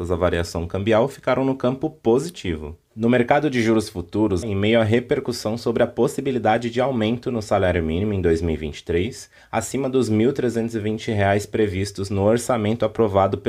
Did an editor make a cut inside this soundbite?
yes; 1 cut; at 4.4 s

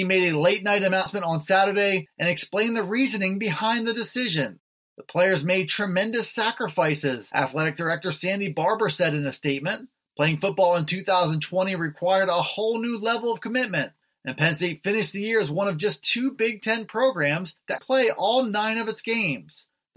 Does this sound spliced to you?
yes; 1 cut; at 17.8 s

